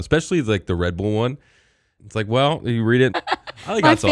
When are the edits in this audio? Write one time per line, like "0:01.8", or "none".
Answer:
0:02.0
0:03.1